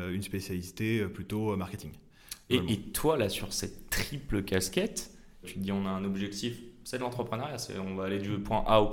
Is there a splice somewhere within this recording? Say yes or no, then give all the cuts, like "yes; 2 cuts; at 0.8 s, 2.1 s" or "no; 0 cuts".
yes; 1 cut; at 5.4 s